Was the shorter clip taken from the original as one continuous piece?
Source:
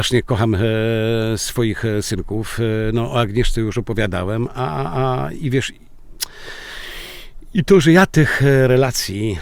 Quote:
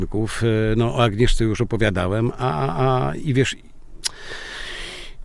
yes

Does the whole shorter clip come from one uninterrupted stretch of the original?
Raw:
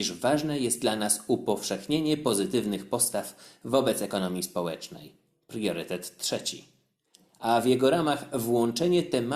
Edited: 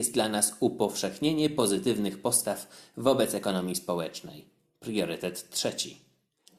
yes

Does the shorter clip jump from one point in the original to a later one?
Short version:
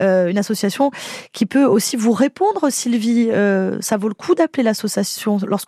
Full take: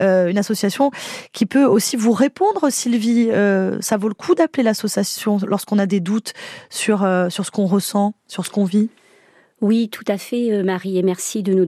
no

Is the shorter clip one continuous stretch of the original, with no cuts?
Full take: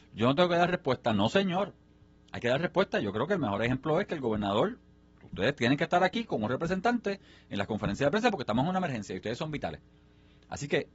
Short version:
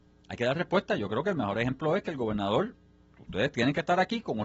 yes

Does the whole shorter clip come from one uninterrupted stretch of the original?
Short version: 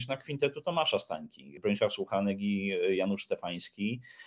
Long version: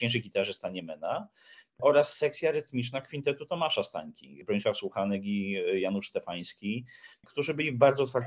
yes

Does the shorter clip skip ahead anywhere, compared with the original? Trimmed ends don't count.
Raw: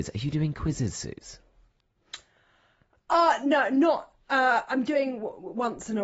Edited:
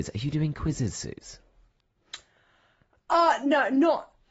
no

